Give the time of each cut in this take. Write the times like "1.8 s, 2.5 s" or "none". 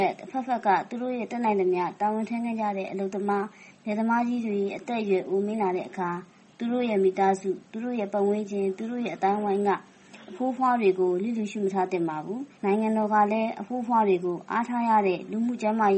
12.5 s